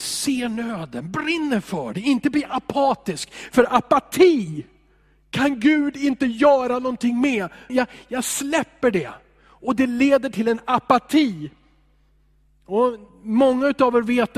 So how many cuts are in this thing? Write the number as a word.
one